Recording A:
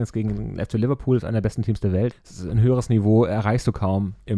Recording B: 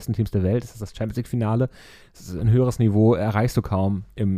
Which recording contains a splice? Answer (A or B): A